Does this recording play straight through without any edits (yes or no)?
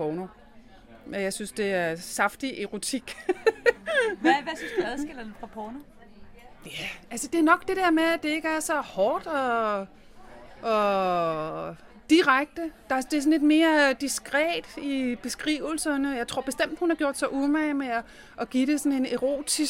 yes